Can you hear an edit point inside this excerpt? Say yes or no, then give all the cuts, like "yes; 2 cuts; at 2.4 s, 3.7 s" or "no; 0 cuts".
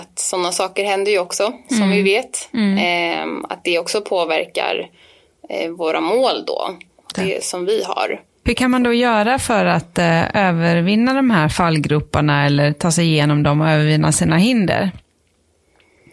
yes; 2 cuts; at 7.1 s, 8.3 s